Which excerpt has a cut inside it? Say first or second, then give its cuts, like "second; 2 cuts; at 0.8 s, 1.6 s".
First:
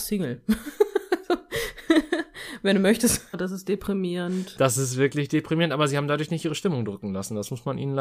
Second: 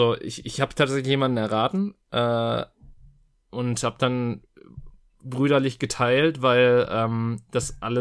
first; 1 cut; at 3.3 s